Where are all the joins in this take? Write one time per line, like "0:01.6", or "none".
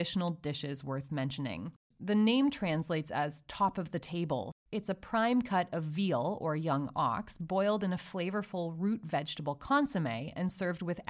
0:01.9
0:04.5